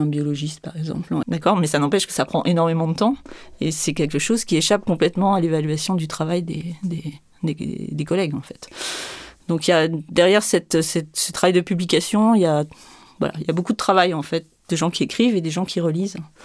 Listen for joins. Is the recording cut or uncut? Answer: cut